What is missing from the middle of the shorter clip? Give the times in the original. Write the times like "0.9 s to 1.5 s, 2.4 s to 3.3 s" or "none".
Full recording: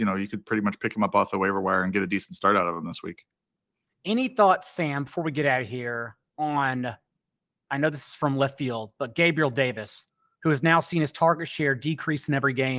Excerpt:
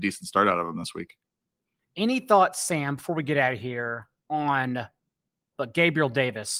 7.6 s to 8.9 s